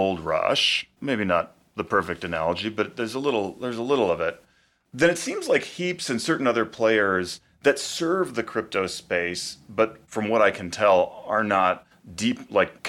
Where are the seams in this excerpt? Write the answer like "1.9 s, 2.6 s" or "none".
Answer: none